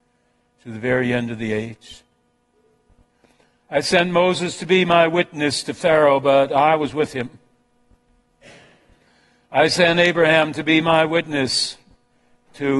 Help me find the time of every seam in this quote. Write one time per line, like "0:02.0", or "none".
none